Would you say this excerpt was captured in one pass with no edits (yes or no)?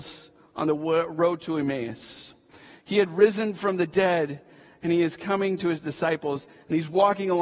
yes